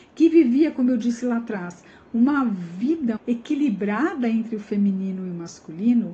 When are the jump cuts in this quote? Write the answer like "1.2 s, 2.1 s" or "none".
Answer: 3.2 s